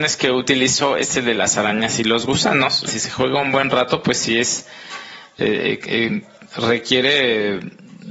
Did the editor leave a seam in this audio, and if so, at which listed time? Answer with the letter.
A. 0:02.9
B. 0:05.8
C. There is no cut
A